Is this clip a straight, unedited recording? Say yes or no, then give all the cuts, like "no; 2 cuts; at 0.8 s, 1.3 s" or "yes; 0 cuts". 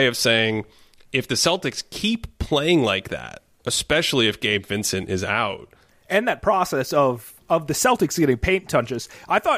no; 1 cut; at 5.9 s